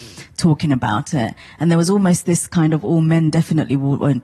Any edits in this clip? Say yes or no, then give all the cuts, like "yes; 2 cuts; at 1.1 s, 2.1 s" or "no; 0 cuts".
no; 0 cuts